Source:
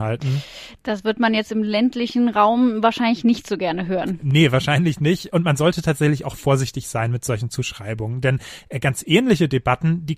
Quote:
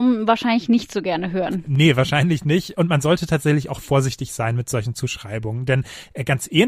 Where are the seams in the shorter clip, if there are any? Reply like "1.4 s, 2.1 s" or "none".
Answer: none